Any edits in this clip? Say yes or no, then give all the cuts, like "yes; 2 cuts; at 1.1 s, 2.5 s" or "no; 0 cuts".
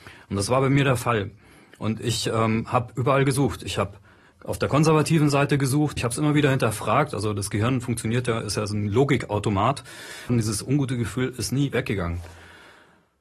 yes; 3 cuts; at 4.3 s, 6.0 s, 10.3 s